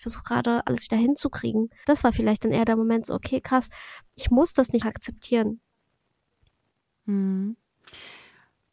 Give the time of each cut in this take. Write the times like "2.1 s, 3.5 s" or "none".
1.8 s, 4.8 s